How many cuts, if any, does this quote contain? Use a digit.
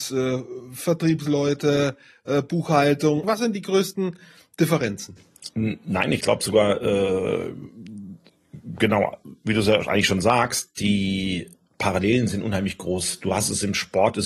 1